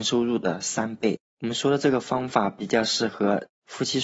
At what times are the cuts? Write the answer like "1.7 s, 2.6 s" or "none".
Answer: 1.3 s